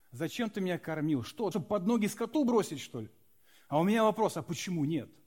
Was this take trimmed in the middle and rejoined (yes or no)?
yes